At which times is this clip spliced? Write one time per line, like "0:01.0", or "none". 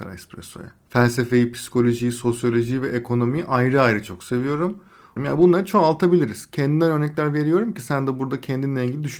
0:05.2